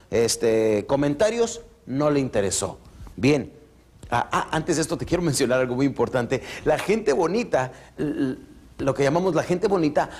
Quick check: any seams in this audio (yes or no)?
yes